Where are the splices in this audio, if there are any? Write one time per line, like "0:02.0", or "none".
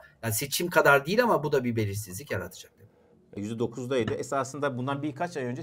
0:03.3